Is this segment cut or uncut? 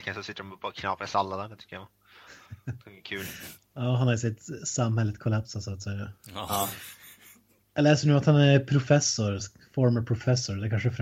uncut